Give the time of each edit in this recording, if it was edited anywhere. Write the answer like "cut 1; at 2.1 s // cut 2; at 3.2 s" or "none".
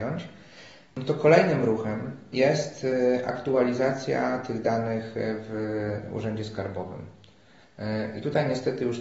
none